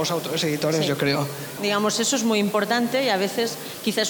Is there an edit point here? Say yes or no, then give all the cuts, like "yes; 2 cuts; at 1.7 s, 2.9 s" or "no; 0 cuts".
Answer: yes; 1 cut; at 1.6 s